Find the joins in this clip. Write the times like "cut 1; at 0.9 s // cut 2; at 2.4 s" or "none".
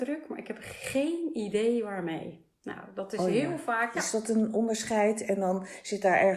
cut 1; at 3.9 s